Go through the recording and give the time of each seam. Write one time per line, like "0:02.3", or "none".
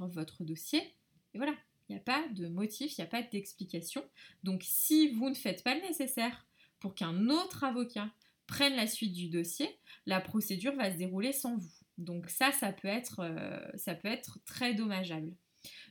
none